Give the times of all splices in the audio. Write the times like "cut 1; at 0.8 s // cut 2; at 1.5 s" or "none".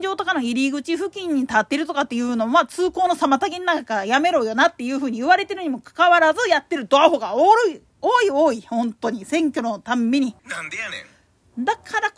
cut 1; at 10.4 s

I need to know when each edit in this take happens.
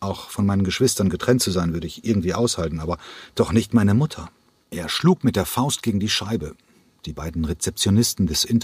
cut 1; at 4.6 s

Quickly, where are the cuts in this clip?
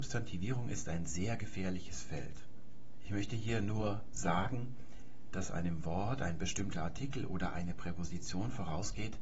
cut 1; at 5.3 s

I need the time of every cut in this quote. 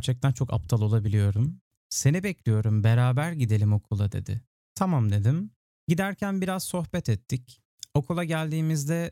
cut 1; at 1.8 s

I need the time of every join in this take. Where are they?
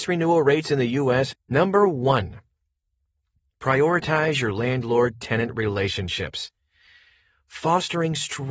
cut 1; at 1.3 s

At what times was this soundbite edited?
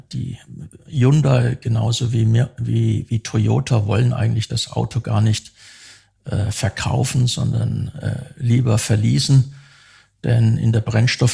none

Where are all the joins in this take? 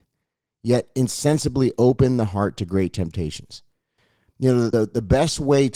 cut 1; at 4.7 s

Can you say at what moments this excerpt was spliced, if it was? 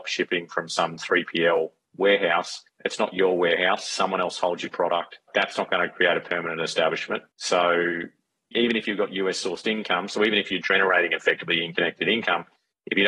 cut 1; at 7.3 s

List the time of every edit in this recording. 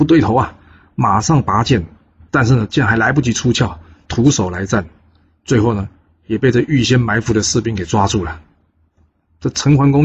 cut 1; at 4.1 s

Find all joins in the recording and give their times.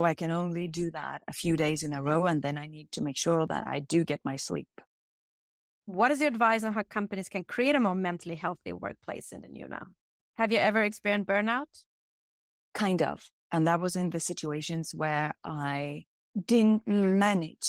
cut 1; at 10.2 s

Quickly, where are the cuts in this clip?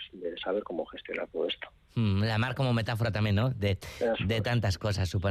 none

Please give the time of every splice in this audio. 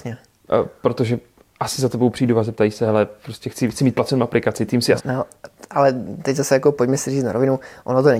cut 1; at 5.0 s

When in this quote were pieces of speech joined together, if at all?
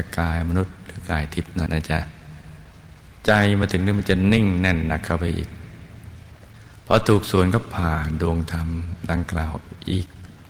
cut 1; at 1.7 s

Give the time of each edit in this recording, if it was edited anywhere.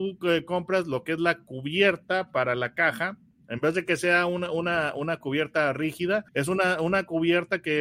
cut 1; at 6.3 s

